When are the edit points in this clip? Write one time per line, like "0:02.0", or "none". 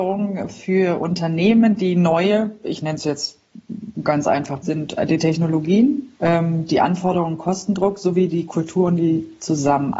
0:04.6
0:06.1